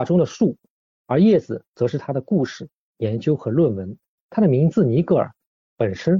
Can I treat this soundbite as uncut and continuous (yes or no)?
no